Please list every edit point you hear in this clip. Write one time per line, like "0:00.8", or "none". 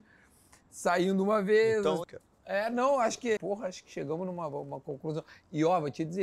0:02.0
0:03.4

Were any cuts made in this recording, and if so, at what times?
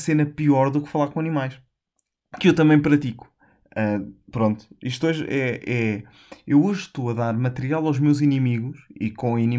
none

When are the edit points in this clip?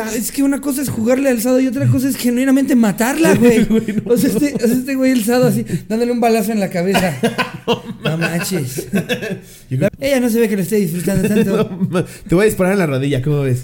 0:09.9

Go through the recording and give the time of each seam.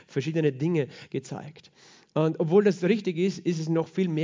none

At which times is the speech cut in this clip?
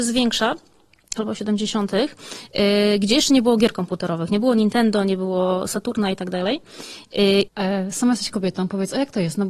0:01.2
0:07.5

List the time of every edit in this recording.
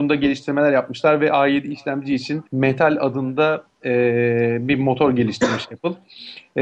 0:02.5

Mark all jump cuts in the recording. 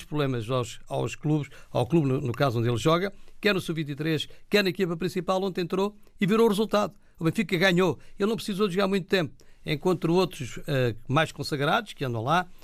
none

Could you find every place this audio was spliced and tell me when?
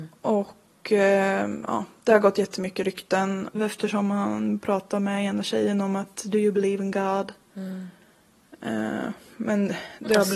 0:03.6

